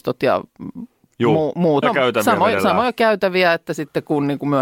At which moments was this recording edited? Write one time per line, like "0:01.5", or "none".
0:01.8

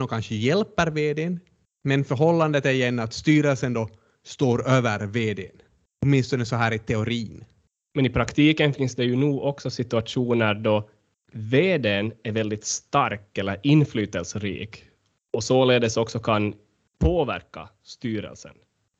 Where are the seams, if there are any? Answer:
none

